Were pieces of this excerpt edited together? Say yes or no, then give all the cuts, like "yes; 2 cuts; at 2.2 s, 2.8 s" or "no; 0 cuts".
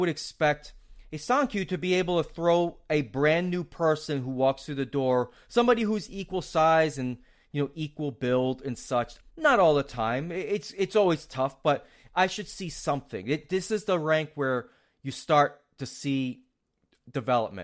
yes; 1 cut; at 9.2 s